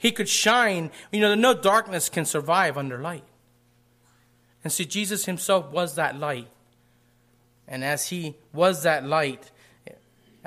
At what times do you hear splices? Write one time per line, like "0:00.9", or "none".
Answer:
none